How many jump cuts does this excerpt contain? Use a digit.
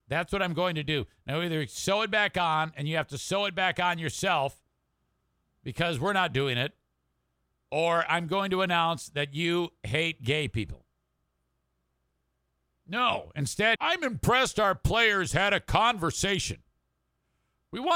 1